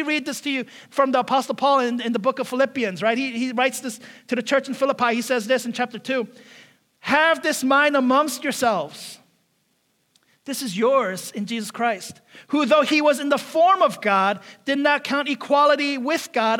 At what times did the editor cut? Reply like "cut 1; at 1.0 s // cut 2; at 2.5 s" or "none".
none